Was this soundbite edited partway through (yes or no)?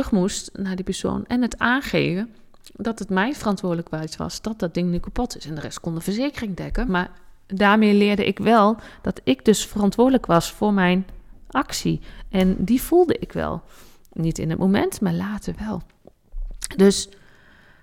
yes